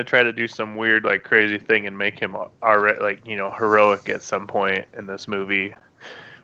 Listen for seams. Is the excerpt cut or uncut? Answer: uncut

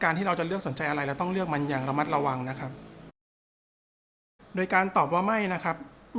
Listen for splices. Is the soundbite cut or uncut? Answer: uncut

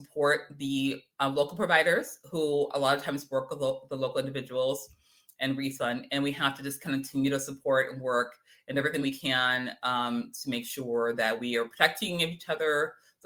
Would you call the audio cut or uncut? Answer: uncut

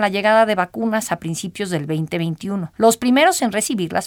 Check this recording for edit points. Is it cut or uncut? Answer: uncut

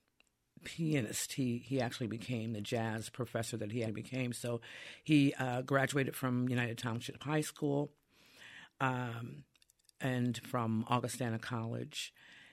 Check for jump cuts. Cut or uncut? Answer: cut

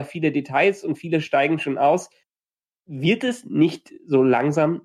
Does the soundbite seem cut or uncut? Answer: uncut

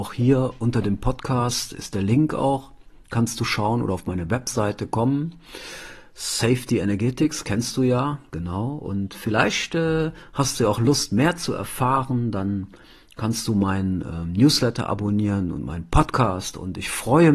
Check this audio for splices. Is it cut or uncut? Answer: uncut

